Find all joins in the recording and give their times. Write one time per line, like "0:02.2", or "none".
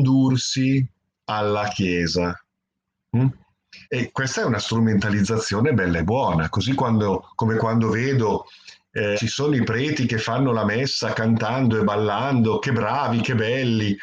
0:03.8
0:09.2